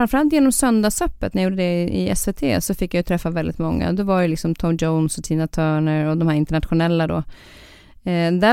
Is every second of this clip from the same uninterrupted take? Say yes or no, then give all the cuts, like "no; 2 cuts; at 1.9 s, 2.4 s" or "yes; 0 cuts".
yes; 0 cuts